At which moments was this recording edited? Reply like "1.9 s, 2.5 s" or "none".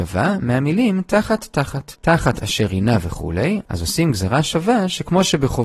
1.9 s